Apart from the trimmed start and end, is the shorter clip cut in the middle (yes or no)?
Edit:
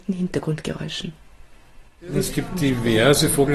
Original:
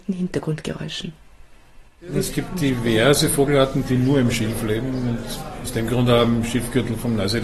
no